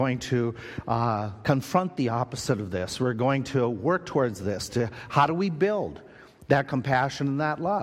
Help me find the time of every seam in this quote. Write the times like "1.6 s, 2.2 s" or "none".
none